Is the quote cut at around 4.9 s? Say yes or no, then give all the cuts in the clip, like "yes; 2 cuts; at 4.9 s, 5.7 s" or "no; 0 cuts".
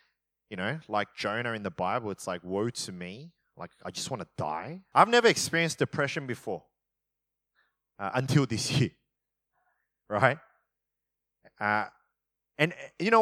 yes; 1 cut; at 4.9 s